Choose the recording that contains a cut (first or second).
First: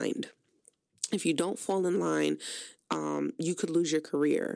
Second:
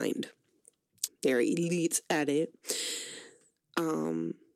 second